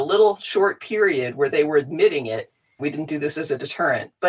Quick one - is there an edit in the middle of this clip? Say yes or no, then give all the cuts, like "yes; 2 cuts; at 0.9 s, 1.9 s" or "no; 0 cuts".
yes; 1 cut; at 2.8 s